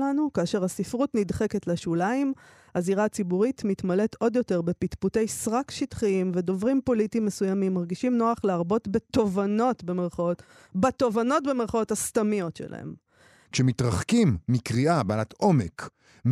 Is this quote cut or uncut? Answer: cut